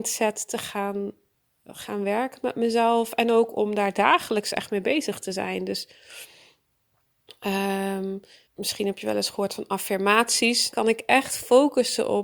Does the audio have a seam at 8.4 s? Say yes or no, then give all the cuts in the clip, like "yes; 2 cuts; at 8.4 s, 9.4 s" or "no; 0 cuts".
yes; 2 cuts; at 8.4 s, 10.7 s